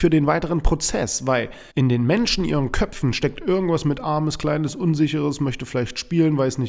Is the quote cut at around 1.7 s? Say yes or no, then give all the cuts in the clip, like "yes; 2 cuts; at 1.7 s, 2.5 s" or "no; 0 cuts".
yes; 1 cut; at 1.7 s